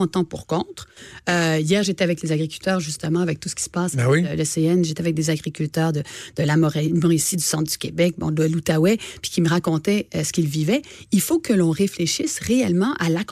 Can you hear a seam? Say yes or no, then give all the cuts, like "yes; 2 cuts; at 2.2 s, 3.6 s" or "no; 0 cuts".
no; 0 cuts